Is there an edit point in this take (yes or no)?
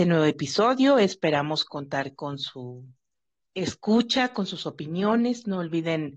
no